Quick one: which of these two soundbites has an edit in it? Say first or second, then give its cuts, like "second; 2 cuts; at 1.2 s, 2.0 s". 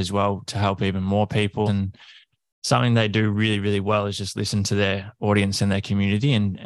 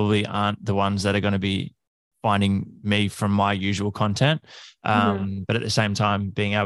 first; 1 cut; at 1.7 s